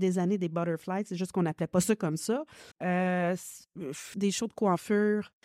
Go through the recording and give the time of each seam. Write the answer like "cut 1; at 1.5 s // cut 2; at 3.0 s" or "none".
cut 1; at 2.7 s // cut 2; at 4.1 s